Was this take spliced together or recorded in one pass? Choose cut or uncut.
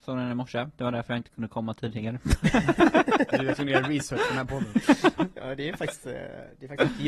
uncut